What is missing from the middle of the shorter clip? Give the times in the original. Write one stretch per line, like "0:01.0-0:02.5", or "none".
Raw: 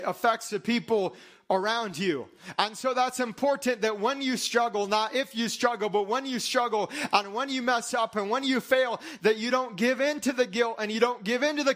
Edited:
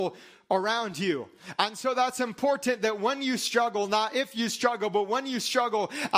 none